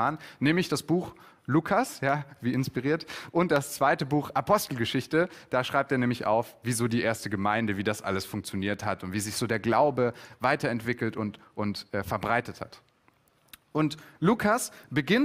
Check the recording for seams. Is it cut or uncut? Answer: uncut